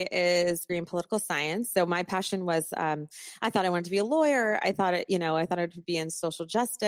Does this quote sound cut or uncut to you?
uncut